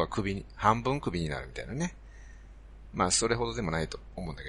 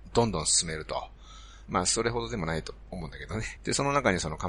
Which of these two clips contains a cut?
second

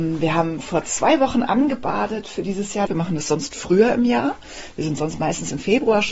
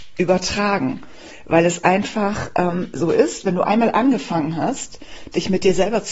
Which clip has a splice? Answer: first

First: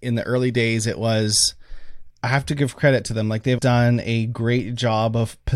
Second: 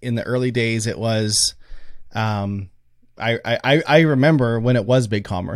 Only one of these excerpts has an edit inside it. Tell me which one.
first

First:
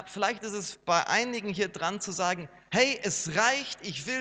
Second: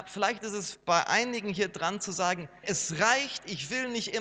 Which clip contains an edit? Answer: second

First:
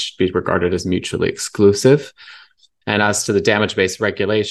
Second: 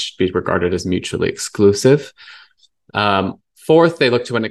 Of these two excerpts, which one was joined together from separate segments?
first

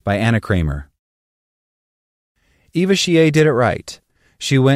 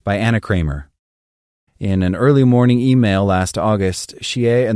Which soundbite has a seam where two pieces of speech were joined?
second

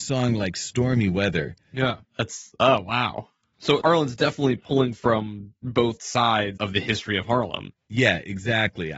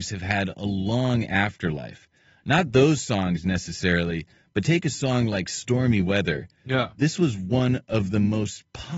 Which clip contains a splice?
first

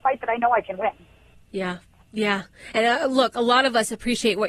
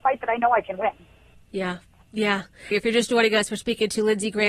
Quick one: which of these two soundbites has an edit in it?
second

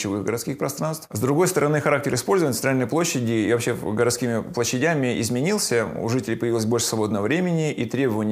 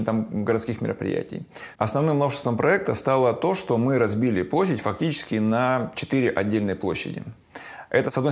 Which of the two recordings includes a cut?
second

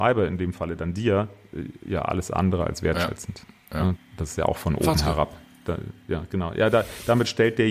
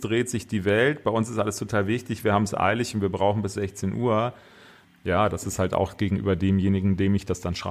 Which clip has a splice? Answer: first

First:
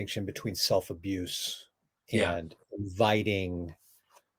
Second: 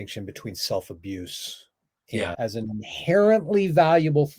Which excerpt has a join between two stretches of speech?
second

